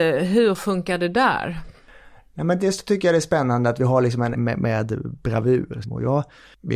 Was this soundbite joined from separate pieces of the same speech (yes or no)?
yes